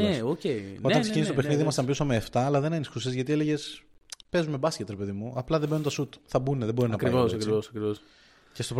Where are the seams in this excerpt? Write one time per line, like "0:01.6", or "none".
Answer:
none